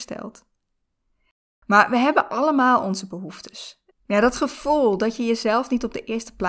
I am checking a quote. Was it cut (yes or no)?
yes